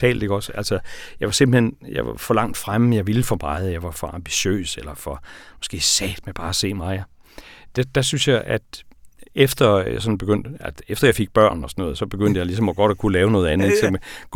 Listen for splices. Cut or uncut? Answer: uncut